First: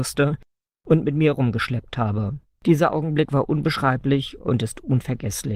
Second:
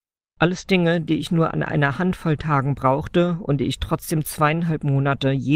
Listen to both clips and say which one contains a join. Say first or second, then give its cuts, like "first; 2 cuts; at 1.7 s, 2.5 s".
first; 1 cut; at 2.5 s